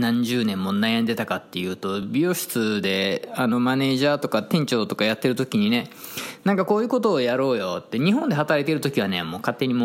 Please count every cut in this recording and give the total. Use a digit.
0